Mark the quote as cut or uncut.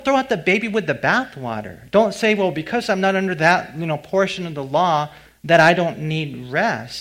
uncut